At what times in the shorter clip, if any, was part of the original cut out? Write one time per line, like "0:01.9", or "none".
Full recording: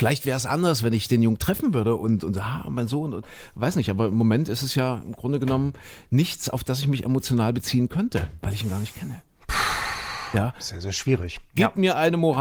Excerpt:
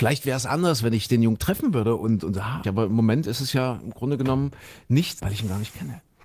0:02.6
0:05.2